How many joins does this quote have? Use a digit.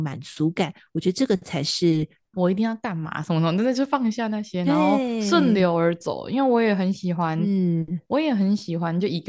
1